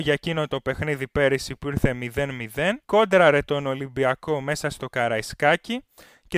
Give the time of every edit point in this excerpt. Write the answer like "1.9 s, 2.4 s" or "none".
2.8 s